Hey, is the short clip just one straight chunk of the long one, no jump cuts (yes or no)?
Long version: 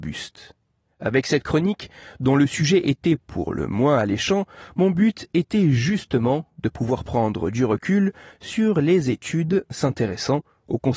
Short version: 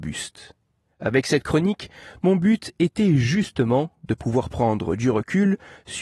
no